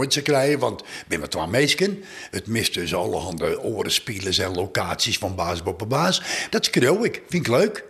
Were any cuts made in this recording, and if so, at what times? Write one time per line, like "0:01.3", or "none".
0:06.5